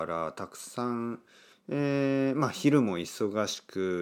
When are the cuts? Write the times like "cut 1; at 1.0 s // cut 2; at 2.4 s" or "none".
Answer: cut 1; at 1.5 s